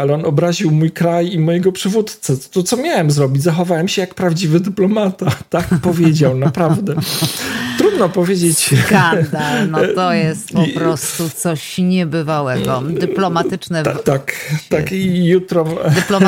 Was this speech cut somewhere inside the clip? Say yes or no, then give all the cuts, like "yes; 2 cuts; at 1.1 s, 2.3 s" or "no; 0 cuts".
yes; 1 cut; at 14.0 s